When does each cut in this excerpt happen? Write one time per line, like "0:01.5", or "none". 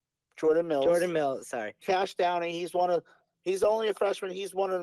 0:01.8